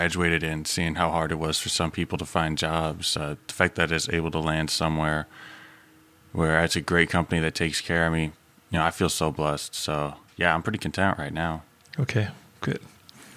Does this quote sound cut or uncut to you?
uncut